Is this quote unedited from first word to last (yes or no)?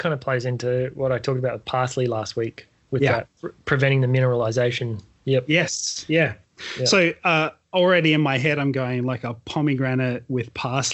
yes